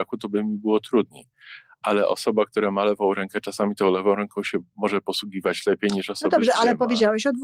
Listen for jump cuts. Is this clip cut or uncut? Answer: uncut